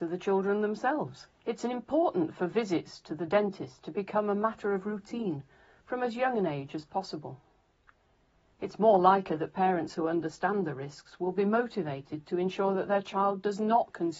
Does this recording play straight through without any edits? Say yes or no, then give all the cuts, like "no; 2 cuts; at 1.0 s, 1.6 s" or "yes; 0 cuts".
no; 1 cut; at 1.3 s